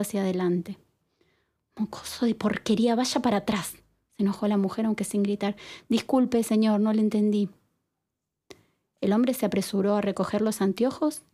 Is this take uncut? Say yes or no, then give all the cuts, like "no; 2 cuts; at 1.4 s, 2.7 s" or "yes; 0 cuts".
yes; 0 cuts